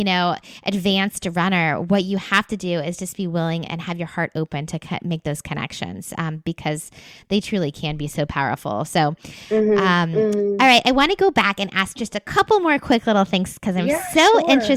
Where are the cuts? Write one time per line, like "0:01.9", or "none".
none